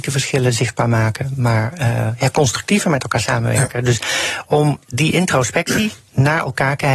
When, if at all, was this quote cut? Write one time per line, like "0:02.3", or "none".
none